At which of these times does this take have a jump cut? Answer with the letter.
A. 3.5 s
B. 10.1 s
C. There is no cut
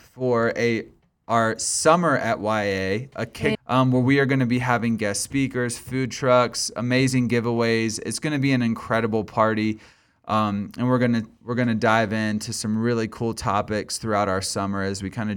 A